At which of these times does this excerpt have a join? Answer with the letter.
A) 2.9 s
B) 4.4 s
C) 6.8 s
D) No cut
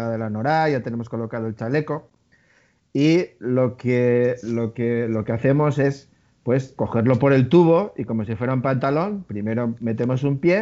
C